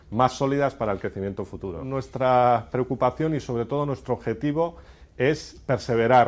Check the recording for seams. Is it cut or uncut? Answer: uncut